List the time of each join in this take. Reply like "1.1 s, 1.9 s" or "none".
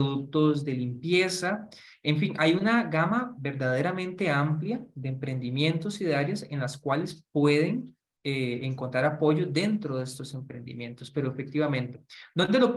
none